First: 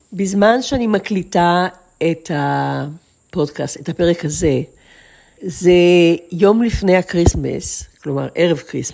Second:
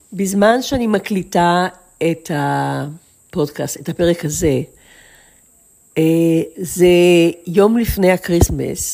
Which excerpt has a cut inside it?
first; 1 cut; at 5.4 s

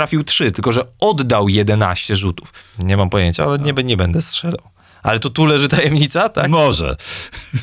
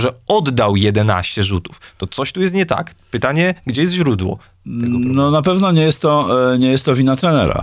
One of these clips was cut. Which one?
first; 1 cut; at 2.6 s

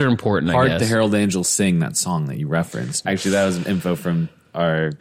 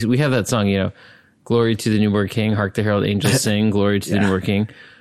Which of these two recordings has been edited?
first; 1 cut; at 3.0 s

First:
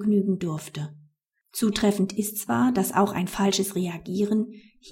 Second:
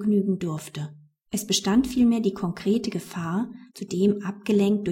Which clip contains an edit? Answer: second; 2 cuts; at 1.2 s, 3.7 s

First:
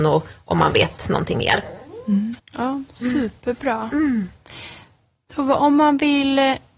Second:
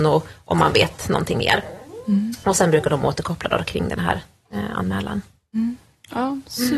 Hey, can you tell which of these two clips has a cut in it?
first; 1 cut; at 2.4 s

